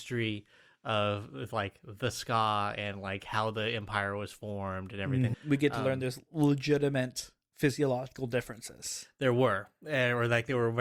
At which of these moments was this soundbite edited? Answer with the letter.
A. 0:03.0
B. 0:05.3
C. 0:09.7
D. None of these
B